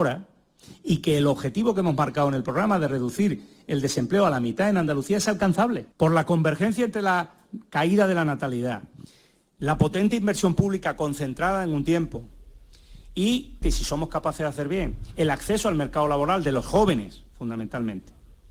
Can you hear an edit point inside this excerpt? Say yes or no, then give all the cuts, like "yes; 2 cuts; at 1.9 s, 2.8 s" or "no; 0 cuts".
yes; 2 cuts; at 5.9 s, 13.6 s